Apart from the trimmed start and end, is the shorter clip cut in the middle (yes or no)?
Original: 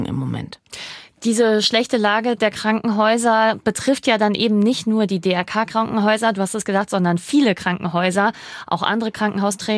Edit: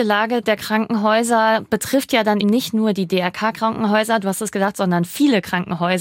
yes